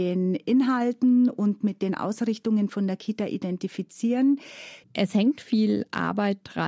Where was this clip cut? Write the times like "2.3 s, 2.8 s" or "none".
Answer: 4.8 s